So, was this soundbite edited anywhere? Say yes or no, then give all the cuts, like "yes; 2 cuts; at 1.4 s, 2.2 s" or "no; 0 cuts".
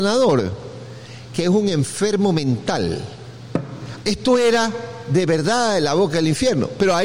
yes; 1 cut; at 4.0 s